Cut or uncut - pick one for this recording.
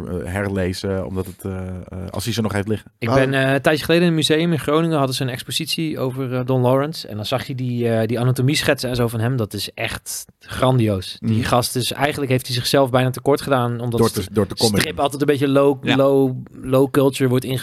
uncut